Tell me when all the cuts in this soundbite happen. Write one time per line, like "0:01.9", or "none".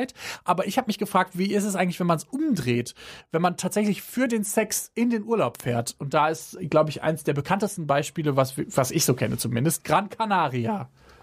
none